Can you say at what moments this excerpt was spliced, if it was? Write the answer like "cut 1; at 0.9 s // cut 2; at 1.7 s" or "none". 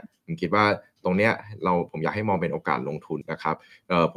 cut 1; at 3.2 s